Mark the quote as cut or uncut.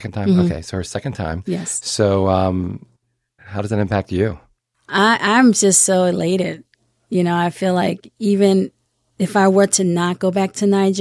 cut